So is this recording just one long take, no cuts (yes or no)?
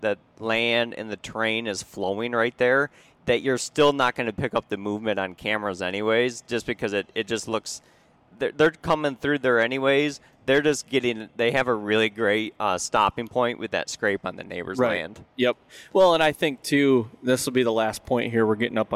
yes